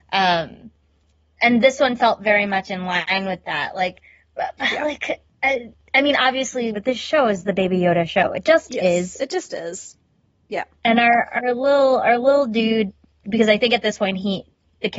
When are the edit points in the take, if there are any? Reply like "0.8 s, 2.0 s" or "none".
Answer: 6.7 s